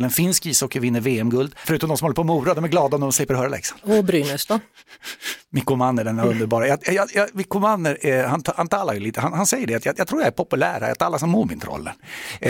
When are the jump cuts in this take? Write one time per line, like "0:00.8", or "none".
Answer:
0:01.6